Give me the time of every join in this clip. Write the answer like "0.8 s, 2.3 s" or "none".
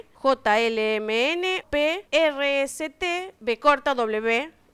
1.6 s